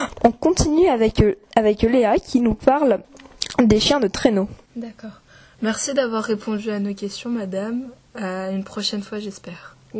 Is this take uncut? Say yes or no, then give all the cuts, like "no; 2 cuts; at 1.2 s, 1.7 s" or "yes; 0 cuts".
no; 2 cuts; at 1.4 s, 4.7 s